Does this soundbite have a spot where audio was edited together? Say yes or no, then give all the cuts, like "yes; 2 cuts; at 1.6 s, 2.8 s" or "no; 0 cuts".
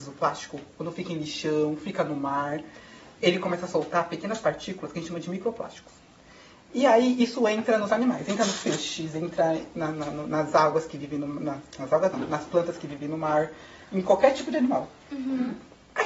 no; 0 cuts